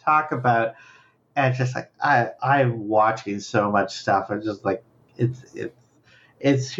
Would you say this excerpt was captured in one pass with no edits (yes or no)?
yes